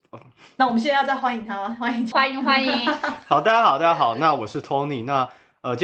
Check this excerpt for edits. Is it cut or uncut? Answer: cut